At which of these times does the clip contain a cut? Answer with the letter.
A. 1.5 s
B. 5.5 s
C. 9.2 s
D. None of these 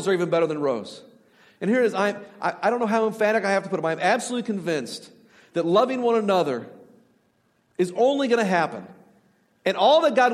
D